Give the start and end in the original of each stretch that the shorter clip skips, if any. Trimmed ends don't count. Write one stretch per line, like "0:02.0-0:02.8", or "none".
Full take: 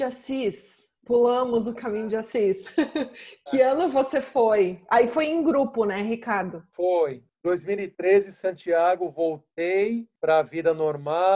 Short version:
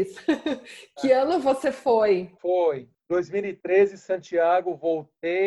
0:04.8-0:06.7